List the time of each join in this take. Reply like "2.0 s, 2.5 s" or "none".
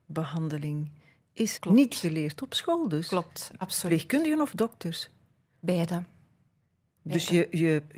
1.6 s